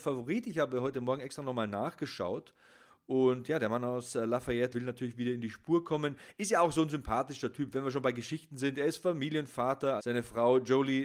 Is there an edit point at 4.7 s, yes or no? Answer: yes